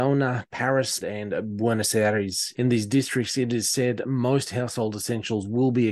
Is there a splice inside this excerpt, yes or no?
yes